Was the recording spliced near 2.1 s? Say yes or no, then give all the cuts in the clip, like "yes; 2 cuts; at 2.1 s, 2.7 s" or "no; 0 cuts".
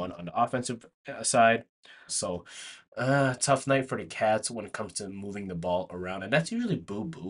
yes; 1 cut; at 2.1 s